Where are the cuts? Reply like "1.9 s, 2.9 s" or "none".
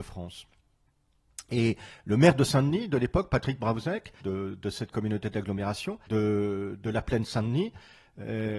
4.2 s, 6.1 s